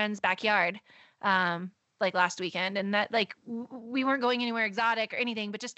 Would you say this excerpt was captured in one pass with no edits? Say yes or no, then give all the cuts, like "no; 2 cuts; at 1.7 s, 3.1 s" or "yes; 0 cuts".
yes; 0 cuts